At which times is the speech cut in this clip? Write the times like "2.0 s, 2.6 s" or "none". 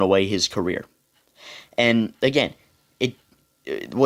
none